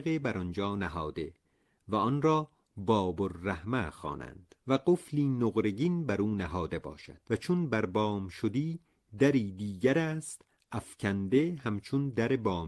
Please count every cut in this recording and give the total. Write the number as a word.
two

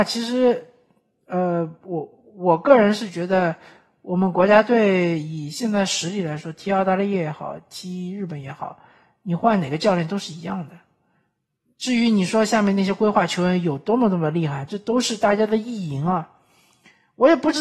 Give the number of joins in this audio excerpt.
zero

